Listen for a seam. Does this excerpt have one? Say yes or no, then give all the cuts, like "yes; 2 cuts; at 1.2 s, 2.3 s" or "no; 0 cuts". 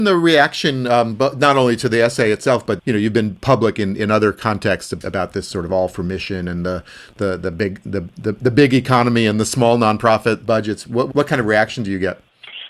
yes; 1 cut; at 2.8 s